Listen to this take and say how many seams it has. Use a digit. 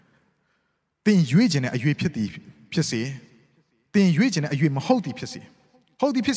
0